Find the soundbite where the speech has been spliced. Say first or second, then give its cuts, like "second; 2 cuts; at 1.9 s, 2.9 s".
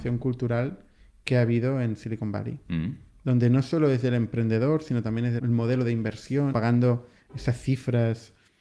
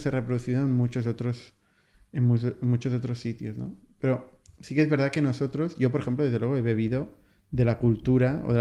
first; 2 cuts; at 5.4 s, 6.5 s